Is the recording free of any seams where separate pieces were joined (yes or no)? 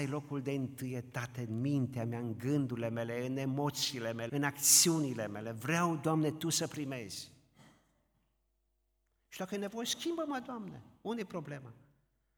no